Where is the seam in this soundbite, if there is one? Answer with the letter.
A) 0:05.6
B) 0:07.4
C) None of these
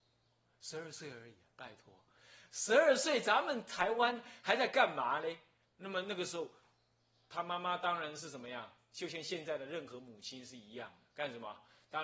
A